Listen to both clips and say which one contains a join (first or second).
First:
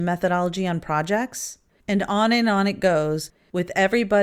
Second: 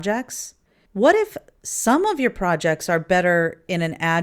first